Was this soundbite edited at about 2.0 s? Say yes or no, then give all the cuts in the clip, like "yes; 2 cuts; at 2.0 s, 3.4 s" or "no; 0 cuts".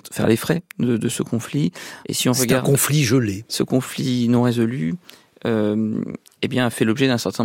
yes; 2 cuts; at 2.0 s, 3.5 s